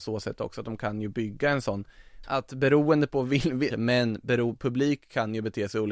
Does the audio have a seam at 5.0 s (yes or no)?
no